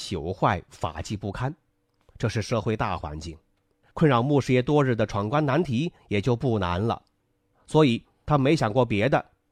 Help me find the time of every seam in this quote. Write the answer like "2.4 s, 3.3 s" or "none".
3.8 s, 7.5 s